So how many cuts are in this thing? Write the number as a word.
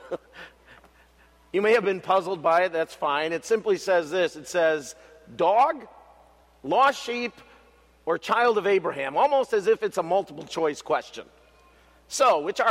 zero